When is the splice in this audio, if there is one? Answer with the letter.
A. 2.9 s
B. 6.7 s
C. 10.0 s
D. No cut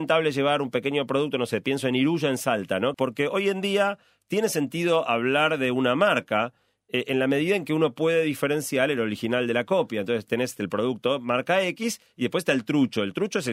A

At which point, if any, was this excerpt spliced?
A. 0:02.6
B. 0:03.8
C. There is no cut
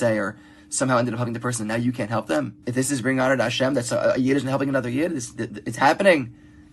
A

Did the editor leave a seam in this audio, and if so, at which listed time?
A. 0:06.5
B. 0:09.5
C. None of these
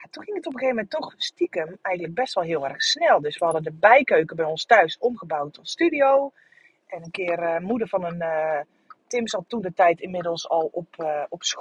B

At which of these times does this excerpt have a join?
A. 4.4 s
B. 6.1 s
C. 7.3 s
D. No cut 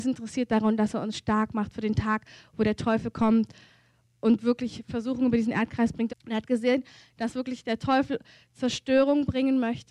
B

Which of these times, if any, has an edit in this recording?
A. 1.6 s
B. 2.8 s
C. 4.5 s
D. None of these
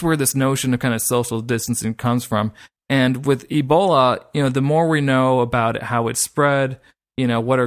D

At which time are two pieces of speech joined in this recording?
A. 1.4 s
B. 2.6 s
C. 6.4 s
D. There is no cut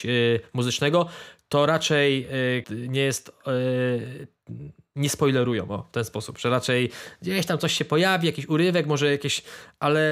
B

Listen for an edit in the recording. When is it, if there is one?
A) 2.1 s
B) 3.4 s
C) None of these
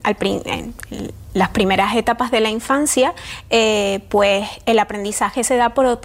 C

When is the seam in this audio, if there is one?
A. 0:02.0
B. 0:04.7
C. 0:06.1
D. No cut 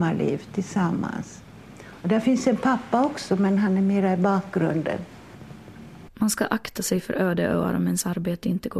C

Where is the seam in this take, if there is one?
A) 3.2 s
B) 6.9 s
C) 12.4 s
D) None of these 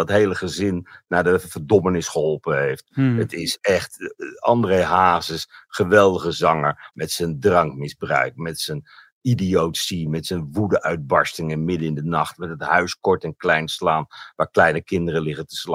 B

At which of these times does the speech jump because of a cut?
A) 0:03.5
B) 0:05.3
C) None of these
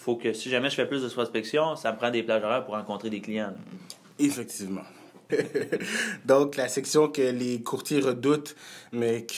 B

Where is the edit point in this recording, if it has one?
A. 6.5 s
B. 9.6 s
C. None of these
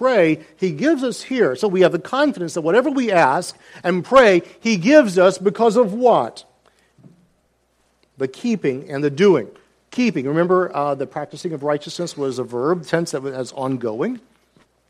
C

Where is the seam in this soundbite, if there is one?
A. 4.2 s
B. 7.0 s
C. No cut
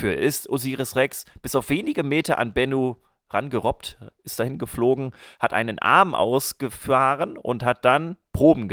A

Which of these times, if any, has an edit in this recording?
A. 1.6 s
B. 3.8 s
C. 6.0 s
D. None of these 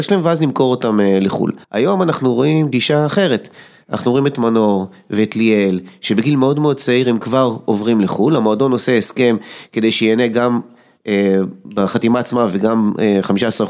A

